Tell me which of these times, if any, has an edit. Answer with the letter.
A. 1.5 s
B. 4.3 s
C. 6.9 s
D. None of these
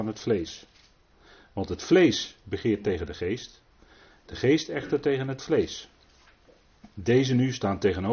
D